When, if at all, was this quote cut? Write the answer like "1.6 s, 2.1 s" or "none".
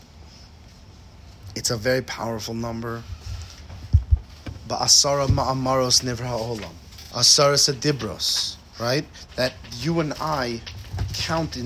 7.1 s, 9.3 s